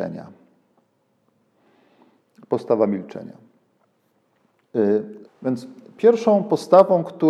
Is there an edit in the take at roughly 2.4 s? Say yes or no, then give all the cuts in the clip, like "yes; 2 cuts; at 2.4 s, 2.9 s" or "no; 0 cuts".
no; 1 cut; at 5.2 s